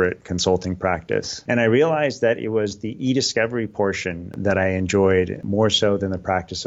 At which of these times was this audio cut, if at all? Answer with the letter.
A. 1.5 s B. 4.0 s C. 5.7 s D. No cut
A